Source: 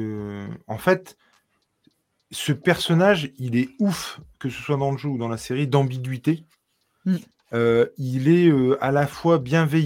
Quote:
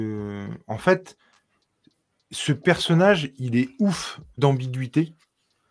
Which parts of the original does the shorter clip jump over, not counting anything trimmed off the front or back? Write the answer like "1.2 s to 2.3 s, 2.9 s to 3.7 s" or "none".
4.4 s to 5.7 s

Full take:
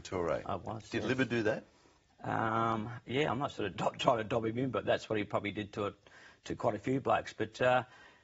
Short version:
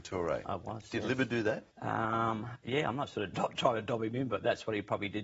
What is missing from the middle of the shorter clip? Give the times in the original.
1.7 s to 2.1 s

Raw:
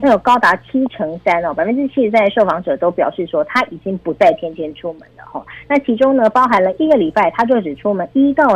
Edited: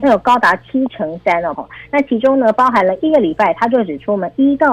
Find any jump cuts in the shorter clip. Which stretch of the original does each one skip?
1.6 s to 5.3 s

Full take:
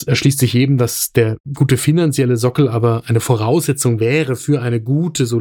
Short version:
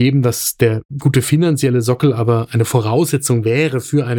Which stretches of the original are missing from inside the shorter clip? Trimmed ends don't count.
none

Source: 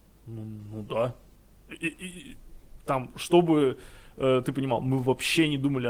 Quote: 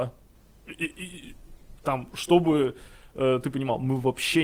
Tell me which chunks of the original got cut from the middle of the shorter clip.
none

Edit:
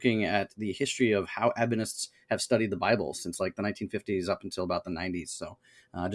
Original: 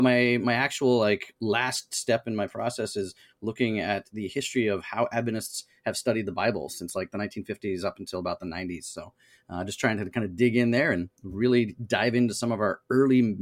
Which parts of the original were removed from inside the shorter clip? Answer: none

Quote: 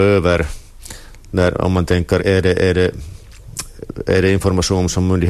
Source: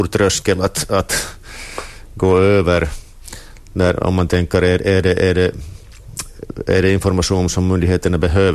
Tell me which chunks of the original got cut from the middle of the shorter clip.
4.6 s to 4.8 s

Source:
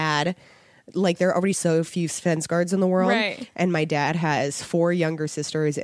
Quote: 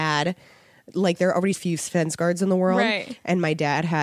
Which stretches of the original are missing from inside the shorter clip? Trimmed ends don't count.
1.5 s to 1.9 s

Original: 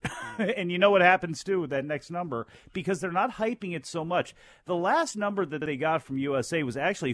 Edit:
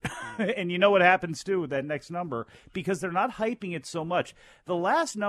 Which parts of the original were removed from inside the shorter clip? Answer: none

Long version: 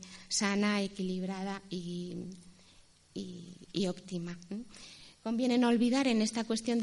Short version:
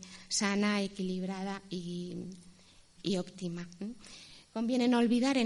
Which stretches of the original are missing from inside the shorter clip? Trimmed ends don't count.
3.0 s to 3.7 s

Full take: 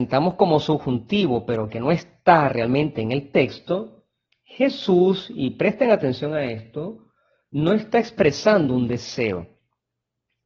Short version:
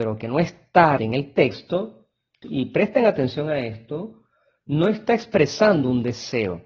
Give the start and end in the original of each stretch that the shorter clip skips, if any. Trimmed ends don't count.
2.5 s to 3.0 s, 4.4 s to 5.3 s

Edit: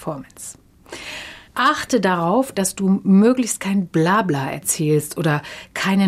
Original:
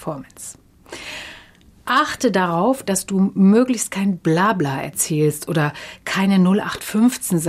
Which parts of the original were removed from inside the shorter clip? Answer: 1.5 s to 1.8 s

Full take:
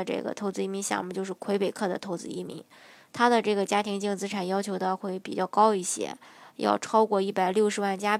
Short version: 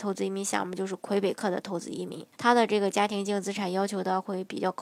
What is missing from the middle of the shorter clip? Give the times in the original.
2.7 s to 3.1 s

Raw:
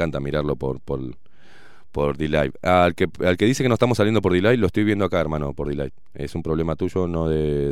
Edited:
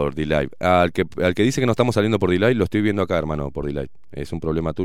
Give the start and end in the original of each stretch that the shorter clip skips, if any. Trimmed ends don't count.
none

